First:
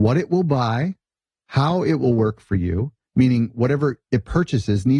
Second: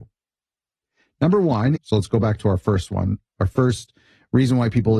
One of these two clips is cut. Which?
second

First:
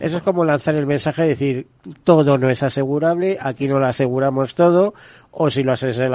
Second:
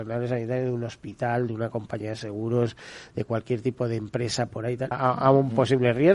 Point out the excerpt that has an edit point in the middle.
second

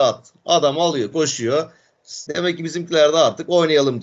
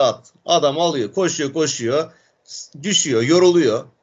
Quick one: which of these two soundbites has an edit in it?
first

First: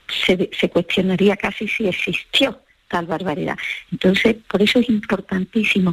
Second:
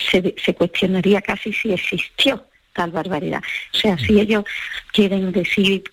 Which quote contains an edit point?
second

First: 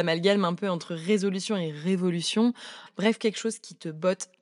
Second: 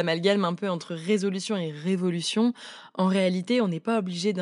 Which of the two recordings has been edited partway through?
first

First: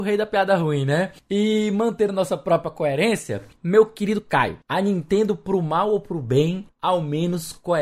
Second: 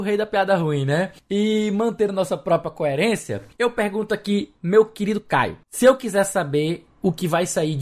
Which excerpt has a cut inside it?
first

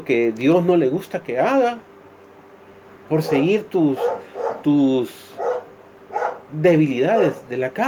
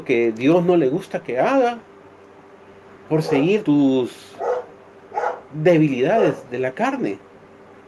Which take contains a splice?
second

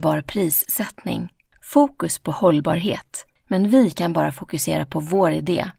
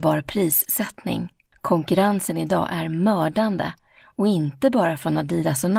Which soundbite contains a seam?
first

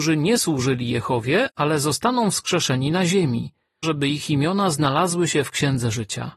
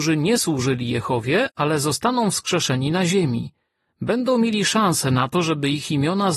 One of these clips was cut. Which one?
first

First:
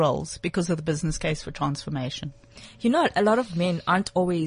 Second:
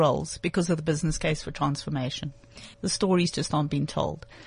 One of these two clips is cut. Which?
second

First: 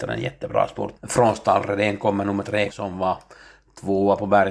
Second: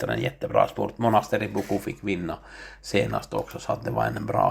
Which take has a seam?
first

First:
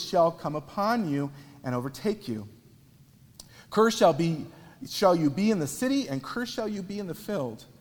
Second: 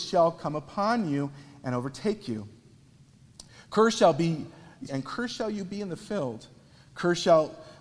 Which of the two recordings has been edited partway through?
second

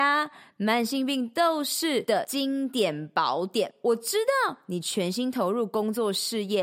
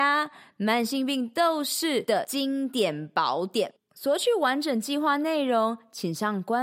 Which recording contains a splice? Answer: second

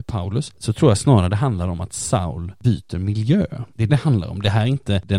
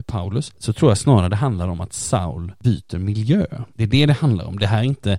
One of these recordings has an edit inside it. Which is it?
first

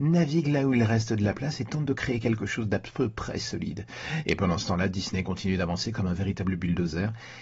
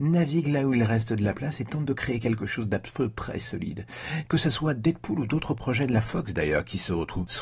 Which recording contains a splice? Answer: second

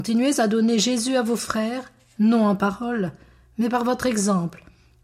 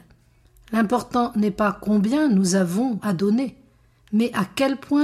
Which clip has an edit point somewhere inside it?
second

